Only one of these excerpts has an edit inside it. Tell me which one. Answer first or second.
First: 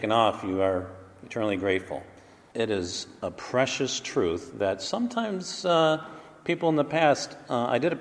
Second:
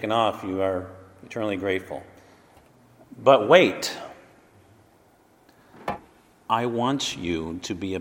first